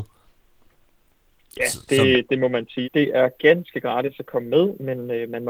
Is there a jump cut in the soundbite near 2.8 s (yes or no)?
yes